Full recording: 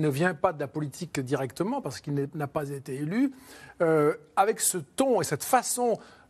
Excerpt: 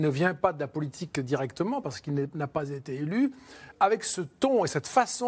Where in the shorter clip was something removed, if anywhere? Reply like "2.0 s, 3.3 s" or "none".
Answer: 3.7 s